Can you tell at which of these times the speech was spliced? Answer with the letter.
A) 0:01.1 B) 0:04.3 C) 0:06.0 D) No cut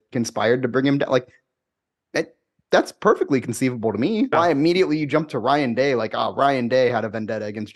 B